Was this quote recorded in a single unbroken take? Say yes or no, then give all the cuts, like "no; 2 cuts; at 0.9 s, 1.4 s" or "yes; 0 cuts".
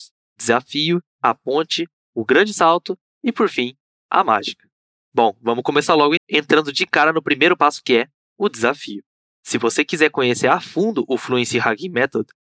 no; 2 cuts; at 6.2 s, 9.3 s